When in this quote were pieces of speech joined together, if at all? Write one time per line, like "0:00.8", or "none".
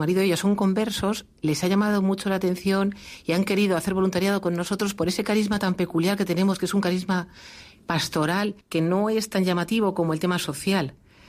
0:08.6